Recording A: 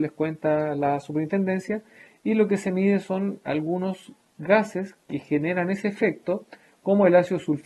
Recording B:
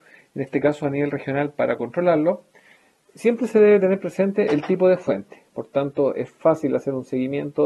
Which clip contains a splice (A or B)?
B